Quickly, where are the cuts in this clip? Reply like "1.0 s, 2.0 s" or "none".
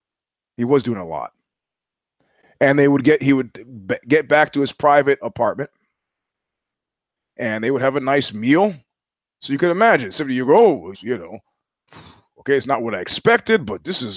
5.2 s, 10.9 s